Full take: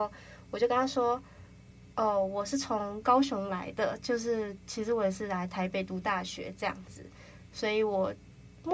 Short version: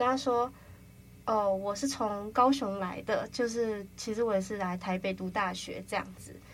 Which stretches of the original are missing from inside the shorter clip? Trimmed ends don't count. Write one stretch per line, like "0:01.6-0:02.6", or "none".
none

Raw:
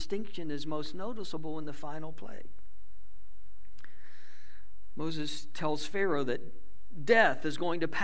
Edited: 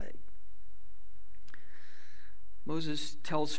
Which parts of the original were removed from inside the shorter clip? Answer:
none

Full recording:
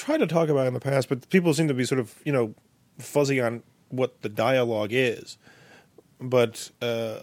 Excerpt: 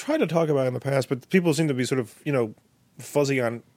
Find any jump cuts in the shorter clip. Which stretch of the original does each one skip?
none

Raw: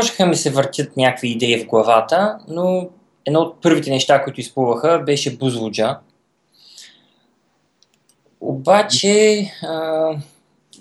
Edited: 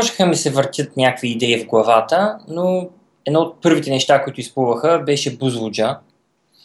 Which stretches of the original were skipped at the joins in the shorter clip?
none

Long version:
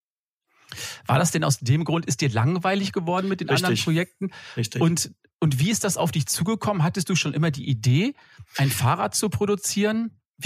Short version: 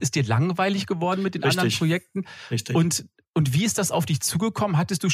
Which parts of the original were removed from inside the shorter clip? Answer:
none

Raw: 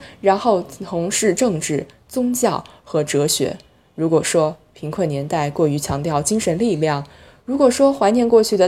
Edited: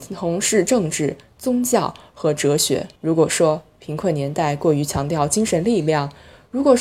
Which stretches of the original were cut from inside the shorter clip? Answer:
0:03.7-0:03.9

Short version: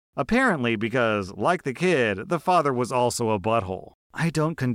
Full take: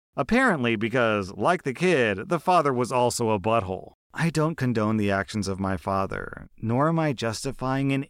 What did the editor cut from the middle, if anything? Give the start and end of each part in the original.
none

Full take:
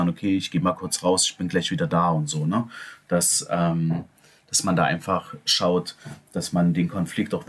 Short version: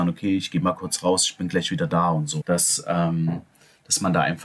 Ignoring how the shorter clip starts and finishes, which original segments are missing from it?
0:02.4-0:03.0

